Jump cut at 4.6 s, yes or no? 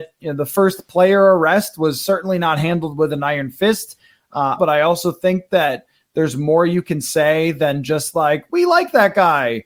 yes